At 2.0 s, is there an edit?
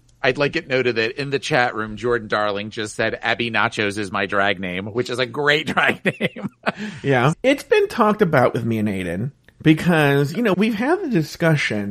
no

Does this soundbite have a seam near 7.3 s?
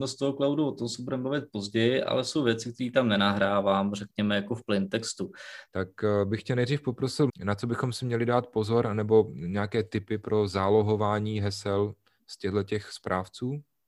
yes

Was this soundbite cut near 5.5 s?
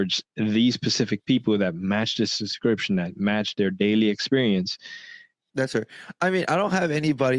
yes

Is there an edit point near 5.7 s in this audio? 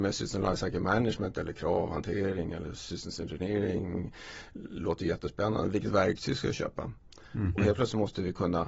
no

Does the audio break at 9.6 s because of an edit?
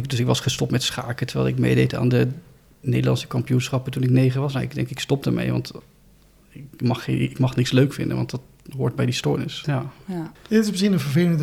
yes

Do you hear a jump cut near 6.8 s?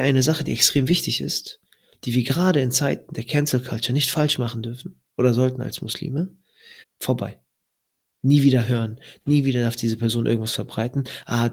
yes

